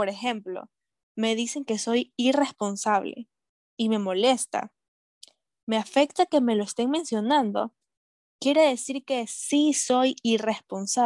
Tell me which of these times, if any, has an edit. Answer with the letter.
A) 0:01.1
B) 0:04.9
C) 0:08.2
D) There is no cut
D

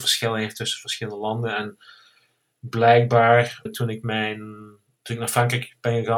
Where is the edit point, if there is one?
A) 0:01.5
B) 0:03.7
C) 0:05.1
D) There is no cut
B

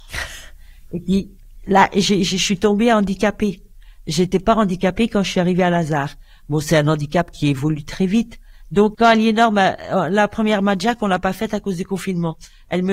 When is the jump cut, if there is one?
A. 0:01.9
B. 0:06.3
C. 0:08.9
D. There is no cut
C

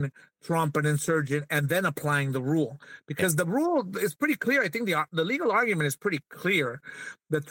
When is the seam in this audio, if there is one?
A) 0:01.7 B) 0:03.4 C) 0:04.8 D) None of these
D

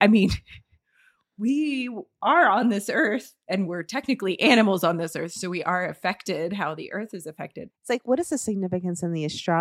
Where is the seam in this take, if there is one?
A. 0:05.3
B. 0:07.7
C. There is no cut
B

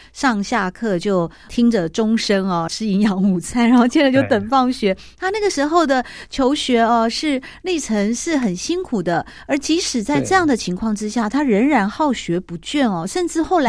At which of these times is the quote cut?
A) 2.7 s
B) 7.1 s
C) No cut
A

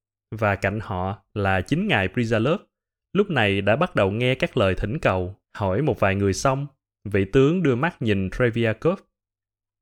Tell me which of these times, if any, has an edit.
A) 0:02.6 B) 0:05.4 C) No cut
B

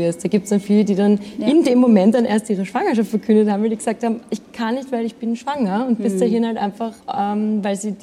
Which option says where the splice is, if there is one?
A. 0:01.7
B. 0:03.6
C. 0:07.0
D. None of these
C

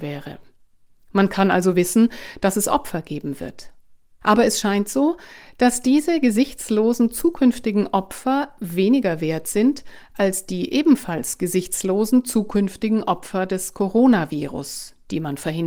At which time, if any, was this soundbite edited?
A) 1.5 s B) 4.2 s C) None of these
B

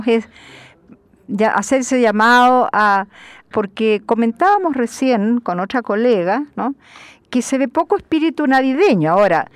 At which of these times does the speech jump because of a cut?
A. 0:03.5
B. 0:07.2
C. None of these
A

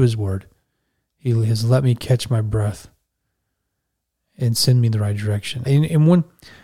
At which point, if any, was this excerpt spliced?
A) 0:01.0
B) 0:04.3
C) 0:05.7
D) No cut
C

